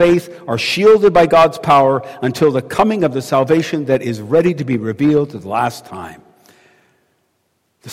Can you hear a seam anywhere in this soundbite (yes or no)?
no